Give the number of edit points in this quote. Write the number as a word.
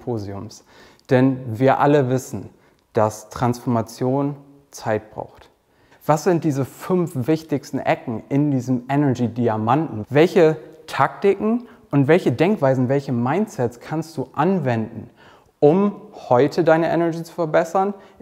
two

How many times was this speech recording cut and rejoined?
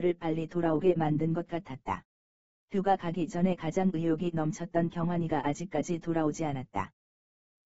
one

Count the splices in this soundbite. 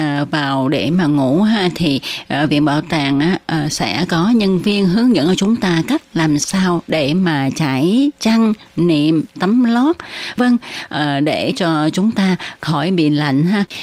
one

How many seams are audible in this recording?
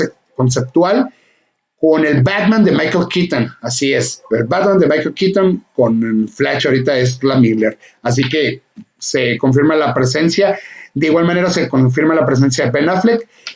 zero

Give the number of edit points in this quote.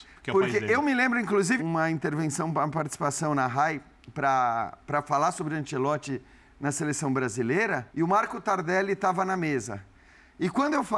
two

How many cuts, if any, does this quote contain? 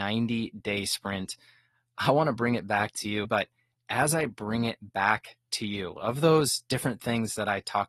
one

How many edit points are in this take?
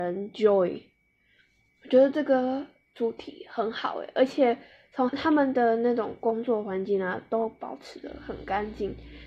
one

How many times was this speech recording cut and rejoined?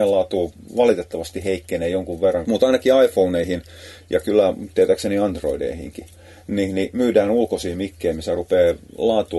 one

